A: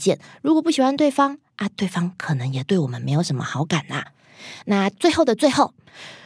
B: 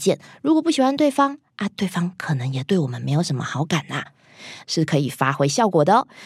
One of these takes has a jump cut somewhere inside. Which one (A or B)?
B